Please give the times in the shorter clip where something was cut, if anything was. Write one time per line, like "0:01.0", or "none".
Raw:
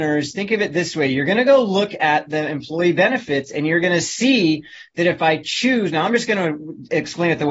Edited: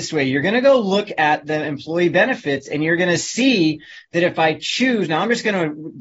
none